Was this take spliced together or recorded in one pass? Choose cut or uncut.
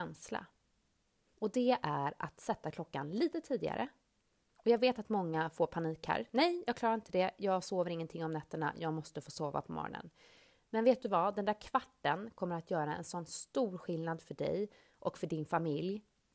cut